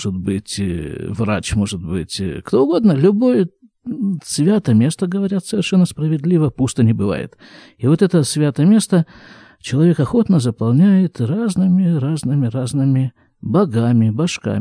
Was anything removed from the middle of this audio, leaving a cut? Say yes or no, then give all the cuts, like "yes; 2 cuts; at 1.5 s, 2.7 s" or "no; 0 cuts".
no; 0 cuts